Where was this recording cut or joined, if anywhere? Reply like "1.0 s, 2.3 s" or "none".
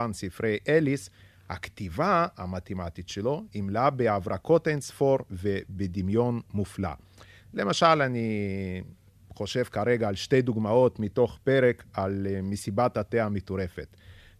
7.4 s